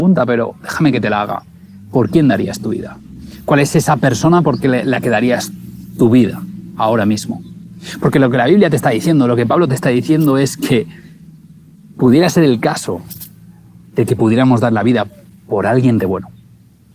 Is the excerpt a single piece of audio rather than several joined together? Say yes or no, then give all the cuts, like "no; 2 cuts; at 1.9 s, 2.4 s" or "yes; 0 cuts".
no; 1 cut; at 16.0 s